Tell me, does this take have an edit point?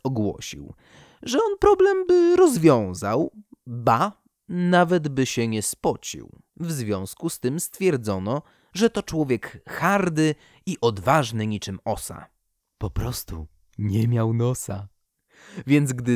yes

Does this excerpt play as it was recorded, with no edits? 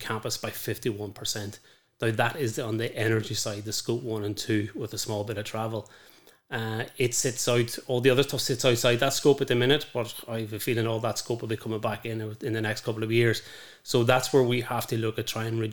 yes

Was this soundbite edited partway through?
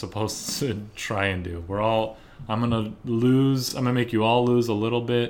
no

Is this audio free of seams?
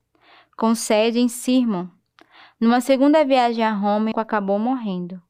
no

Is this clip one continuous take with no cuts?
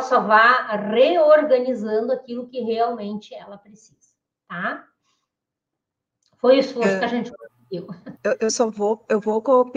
no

